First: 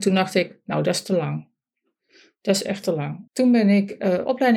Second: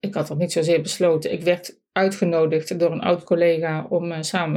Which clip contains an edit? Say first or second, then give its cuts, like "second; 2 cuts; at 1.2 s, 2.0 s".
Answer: first; 1 cut; at 3.3 s